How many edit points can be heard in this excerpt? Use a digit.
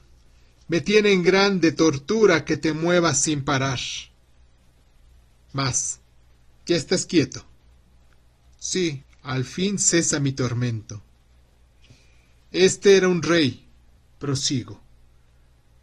2